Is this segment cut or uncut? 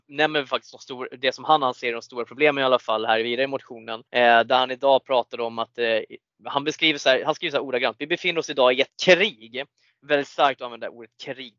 cut